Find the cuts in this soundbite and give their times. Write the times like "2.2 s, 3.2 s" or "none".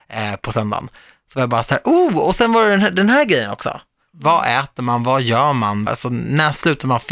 4.1 s, 5.9 s

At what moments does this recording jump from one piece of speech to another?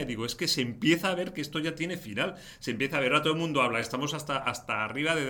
none

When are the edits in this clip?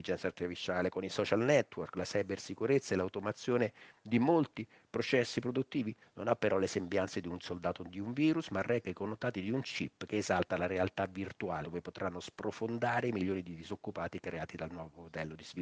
6.0 s, 11.6 s

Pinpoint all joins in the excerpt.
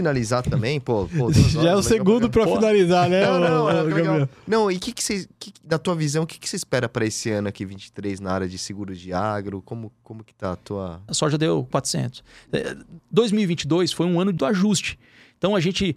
11.1 s, 13.0 s, 14.4 s

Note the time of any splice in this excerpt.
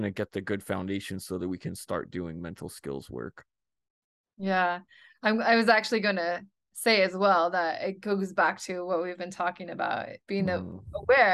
10.2 s

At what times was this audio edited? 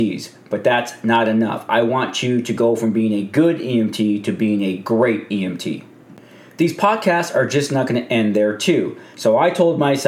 9.1 s

